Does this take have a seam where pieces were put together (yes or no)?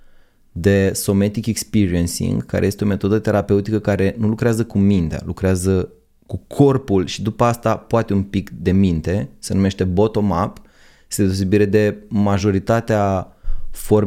no